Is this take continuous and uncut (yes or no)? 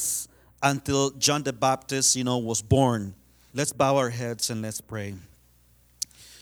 no